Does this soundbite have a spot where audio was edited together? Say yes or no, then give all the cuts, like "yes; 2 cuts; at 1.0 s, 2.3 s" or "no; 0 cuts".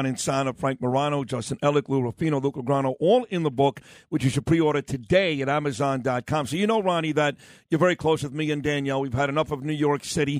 no; 0 cuts